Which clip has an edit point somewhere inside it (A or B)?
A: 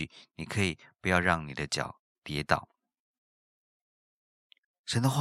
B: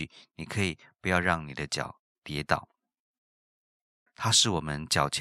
B